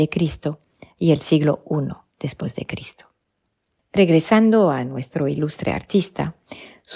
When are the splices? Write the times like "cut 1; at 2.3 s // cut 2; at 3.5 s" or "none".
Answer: none